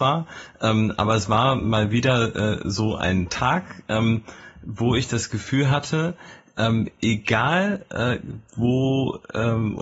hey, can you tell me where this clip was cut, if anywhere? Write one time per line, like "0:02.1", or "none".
none